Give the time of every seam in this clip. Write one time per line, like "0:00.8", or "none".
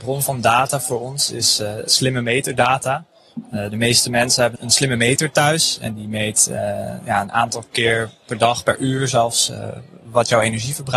0:04.5